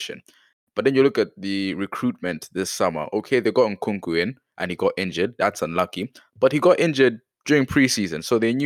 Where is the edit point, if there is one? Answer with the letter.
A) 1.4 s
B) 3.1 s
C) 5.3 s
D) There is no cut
D